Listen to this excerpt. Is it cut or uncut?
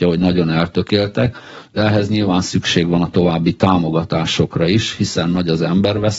uncut